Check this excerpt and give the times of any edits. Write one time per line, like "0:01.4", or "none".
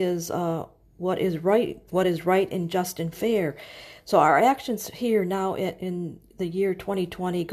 none